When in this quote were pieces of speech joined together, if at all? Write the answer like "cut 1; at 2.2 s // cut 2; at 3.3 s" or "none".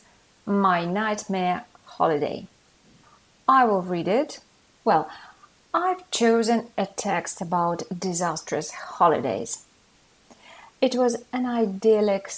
cut 1; at 4.7 s // cut 2; at 10.7 s

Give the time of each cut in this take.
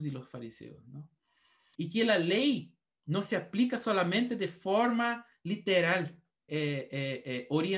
cut 1; at 1.7 s // cut 2; at 6.5 s

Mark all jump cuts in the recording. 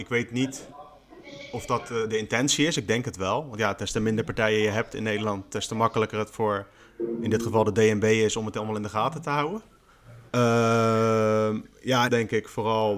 cut 1; at 10.3 s // cut 2; at 12.1 s

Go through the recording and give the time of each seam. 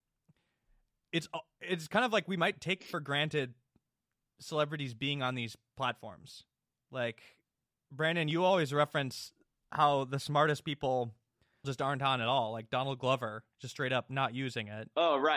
cut 1; at 11.6 s

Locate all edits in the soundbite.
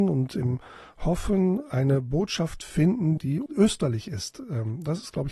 cut 1; at 3.2 s

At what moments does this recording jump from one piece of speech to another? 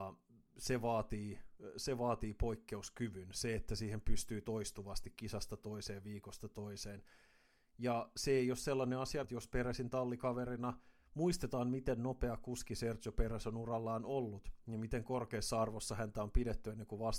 cut 1; at 9.2 s

